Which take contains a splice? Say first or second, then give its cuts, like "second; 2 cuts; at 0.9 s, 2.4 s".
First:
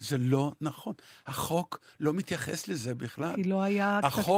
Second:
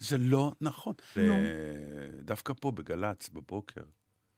second; 1 cut; at 1.2 s